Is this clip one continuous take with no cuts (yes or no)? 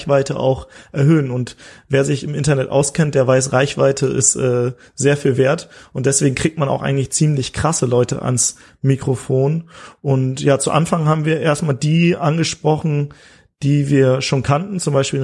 yes